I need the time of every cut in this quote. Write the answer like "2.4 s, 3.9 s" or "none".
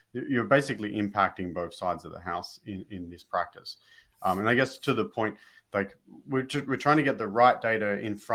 none